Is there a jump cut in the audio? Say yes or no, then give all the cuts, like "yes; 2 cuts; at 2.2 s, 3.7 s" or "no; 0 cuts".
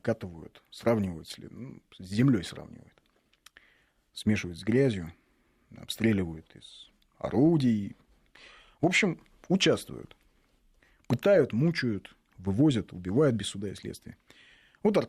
no; 0 cuts